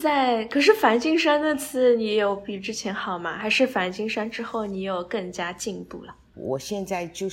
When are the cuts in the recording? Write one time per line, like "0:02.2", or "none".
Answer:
0:06.4